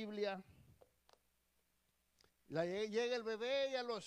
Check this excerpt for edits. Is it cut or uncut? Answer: cut